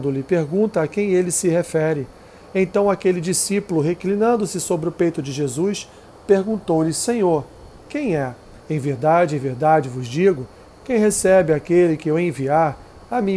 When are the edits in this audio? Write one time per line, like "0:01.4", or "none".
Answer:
0:08.6